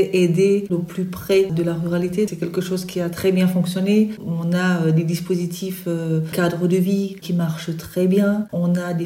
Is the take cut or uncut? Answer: cut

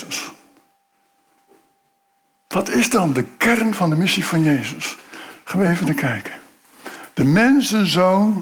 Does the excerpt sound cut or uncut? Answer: uncut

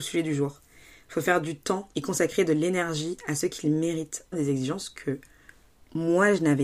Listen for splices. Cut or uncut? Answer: cut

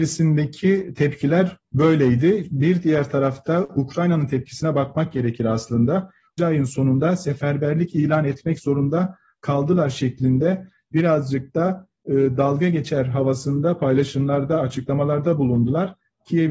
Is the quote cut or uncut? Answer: cut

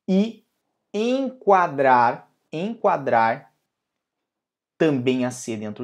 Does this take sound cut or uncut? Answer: uncut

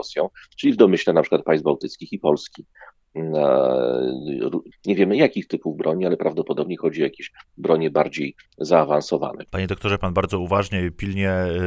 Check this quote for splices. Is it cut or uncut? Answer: cut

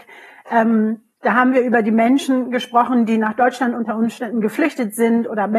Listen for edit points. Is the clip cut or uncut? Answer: cut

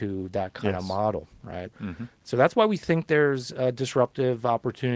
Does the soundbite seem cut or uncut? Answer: cut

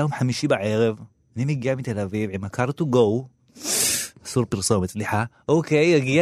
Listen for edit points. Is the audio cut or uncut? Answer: uncut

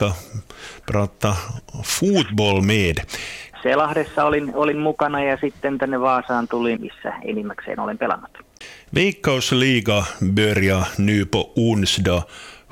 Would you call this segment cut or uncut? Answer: cut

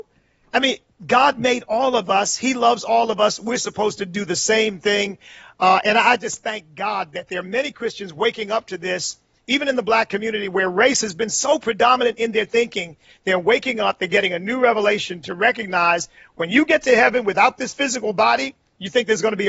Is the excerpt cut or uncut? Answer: uncut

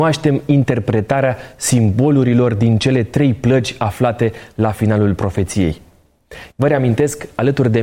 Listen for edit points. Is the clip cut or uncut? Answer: cut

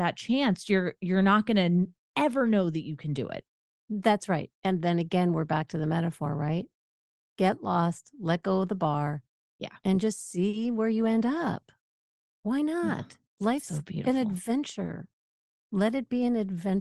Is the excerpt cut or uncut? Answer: uncut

